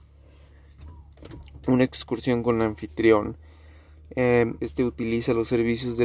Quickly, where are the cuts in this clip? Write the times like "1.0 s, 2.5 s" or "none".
4.6 s